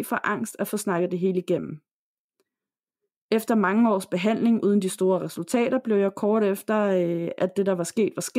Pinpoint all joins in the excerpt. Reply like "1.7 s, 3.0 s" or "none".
7.4 s